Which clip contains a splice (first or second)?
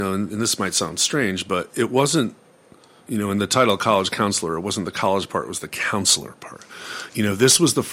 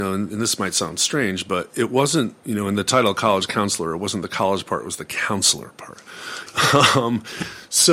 second